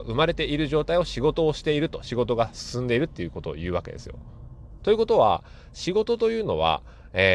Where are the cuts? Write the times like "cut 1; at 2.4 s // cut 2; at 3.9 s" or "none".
none